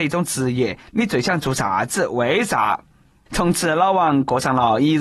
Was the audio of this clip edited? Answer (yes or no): yes